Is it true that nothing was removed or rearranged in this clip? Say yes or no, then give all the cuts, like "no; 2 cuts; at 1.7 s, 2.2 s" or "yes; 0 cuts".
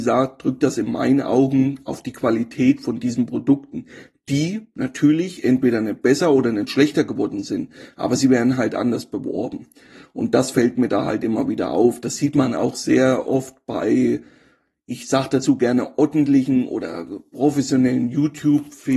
yes; 0 cuts